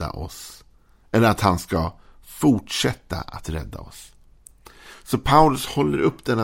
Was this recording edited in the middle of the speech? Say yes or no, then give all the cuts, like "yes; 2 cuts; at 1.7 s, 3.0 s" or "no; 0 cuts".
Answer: no; 0 cuts